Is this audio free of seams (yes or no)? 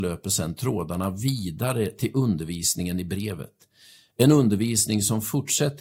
yes